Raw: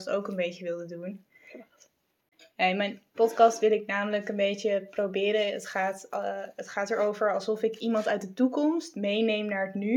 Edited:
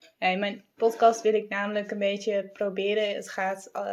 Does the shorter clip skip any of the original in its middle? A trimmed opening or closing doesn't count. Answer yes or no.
no